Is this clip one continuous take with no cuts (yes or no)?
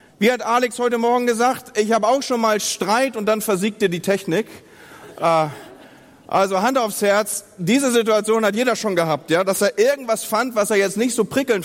yes